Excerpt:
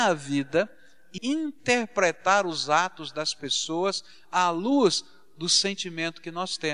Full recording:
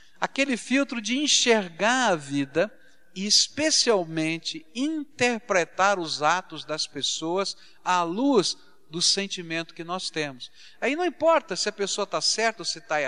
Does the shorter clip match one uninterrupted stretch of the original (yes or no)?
no